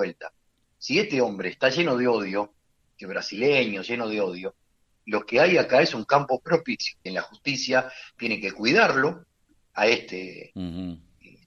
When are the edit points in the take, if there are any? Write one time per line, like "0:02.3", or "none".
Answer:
0:07.1